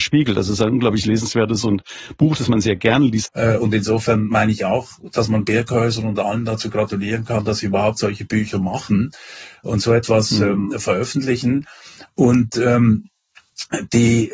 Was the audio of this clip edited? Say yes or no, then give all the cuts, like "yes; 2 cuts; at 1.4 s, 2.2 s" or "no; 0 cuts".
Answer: yes; 1 cut; at 3.3 s